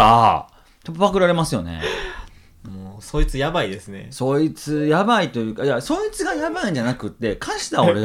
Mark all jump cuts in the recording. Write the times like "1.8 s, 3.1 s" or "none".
none